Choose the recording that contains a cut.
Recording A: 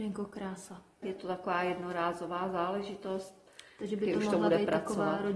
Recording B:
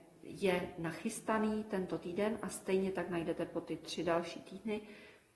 A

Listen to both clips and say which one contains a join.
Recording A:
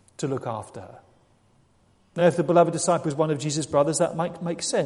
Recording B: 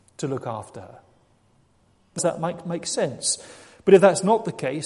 B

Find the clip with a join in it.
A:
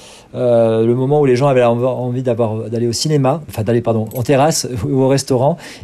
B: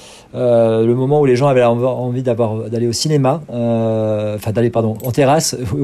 A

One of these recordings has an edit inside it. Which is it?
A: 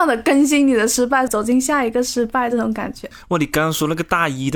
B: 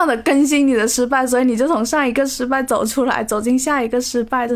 A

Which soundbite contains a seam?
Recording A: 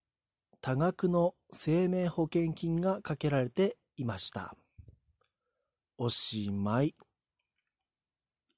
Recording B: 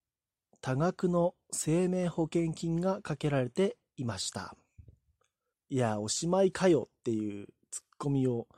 B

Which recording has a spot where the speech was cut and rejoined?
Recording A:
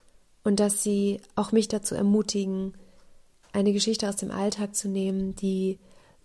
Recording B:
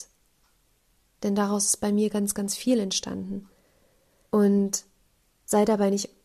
B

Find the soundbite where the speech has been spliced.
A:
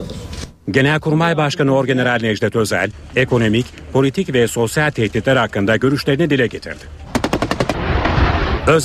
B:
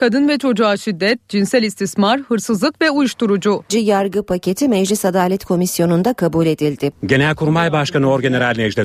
B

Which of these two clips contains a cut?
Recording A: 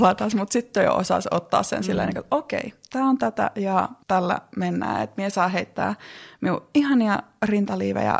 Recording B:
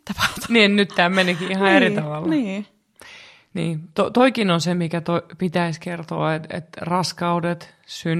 A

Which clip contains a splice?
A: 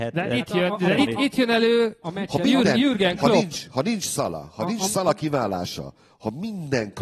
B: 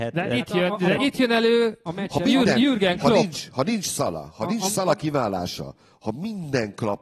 B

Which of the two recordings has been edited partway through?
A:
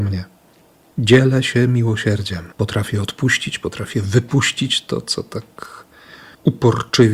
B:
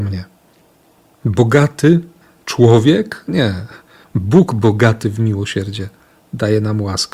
A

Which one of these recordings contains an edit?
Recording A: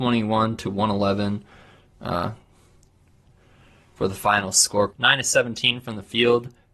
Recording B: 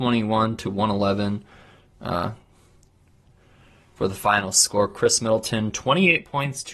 A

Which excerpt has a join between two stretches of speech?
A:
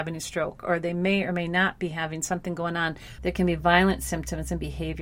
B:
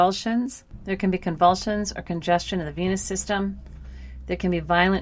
A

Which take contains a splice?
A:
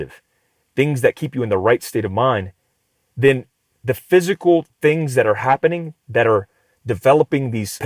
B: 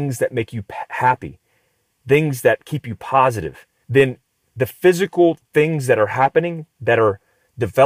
B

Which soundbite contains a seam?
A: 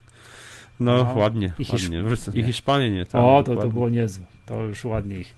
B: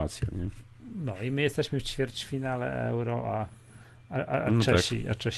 A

